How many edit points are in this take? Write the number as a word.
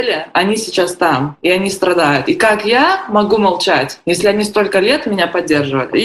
zero